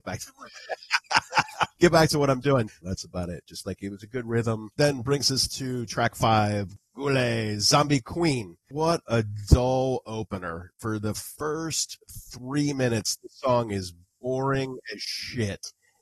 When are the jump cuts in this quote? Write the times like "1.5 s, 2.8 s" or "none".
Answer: 2.8 s